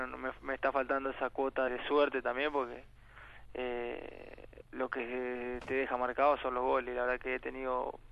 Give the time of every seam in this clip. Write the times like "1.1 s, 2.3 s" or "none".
1.7 s, 4.6 s